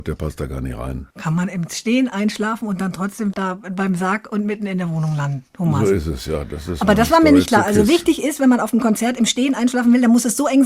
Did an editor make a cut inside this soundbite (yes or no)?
no